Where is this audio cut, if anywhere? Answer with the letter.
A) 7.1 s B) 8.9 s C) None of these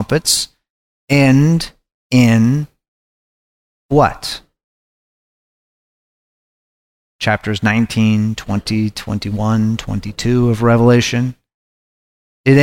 C